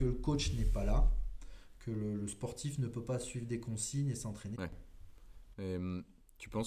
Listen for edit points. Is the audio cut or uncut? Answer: cut